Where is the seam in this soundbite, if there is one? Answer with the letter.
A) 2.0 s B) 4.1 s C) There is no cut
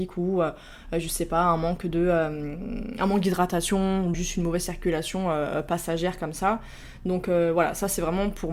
B